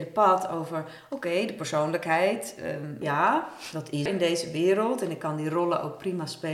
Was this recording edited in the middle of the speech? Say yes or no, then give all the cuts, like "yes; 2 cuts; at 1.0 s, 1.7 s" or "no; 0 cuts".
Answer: yes; 2 cuts; at 3.0 s, 4.1 s